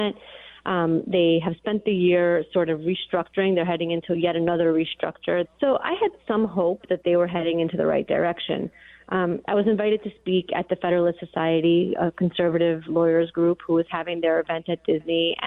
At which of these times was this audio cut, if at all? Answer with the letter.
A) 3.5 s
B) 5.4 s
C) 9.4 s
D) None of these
B